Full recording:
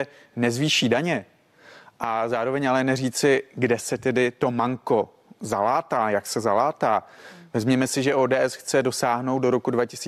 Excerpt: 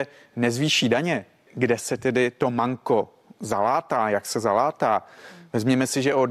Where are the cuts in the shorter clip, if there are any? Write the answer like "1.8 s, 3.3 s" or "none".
1.5 s